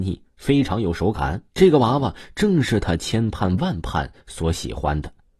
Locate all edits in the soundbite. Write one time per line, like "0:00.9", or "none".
0:01.5